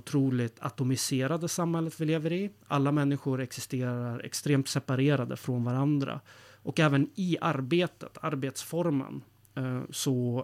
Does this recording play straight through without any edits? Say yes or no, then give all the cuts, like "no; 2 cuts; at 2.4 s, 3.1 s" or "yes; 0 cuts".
yes; 0 cuts